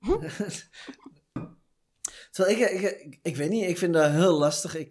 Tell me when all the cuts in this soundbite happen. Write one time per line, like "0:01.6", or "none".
0:01.4

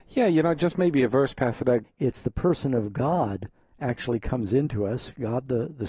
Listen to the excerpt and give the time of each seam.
0:01.8

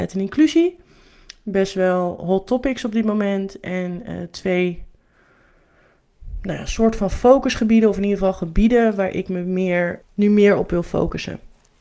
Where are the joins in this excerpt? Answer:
0:10.0

